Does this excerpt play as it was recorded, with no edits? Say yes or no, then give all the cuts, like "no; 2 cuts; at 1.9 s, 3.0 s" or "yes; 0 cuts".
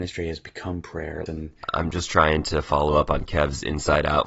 no; 1 cut; at 1.3 s